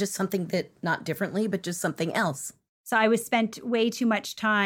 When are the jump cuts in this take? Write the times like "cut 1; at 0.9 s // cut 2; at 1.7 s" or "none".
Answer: cut 1; at 2.7 s